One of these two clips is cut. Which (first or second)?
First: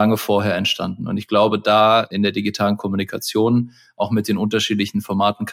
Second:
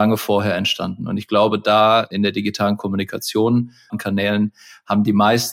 second